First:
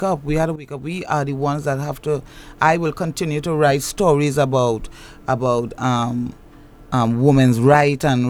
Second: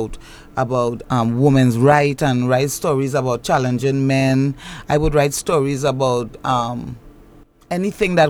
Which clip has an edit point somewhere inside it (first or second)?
second